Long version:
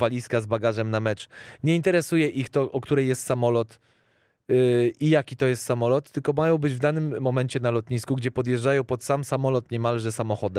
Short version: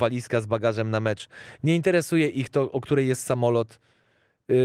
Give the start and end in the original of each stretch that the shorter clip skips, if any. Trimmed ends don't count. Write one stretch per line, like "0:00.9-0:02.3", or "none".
none